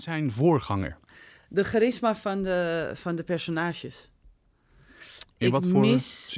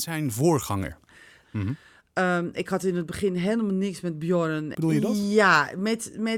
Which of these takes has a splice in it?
second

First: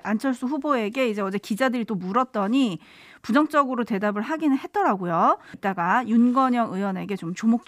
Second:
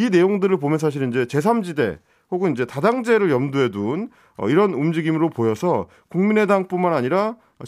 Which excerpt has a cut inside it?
first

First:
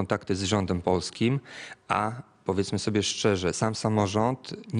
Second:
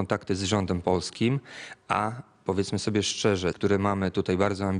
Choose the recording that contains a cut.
second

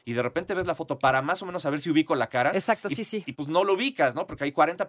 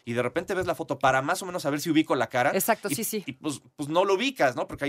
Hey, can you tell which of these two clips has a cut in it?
first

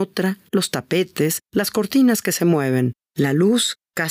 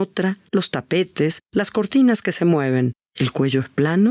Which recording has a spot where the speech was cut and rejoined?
second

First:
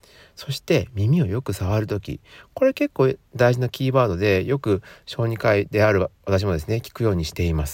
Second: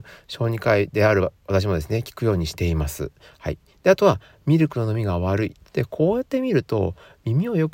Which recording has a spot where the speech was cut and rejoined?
second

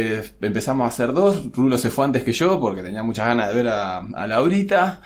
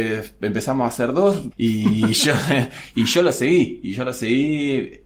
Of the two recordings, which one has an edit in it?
second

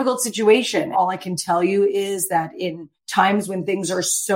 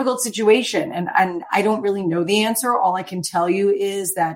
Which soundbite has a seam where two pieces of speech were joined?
first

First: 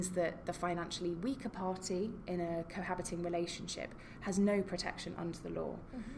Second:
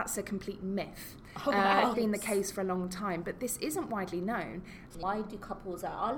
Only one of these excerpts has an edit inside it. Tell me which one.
second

